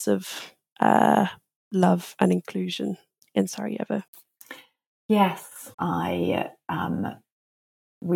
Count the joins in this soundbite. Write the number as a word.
one